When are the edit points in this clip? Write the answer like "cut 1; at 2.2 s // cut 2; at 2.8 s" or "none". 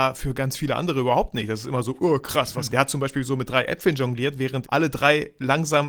cut 1; at 2.7 s // cut 2; at 4.6 s